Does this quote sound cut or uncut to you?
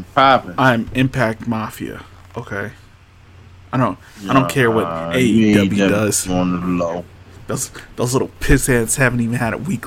uncut